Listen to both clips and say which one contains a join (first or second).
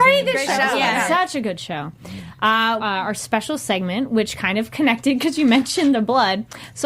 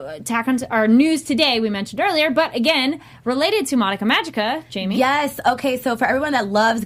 first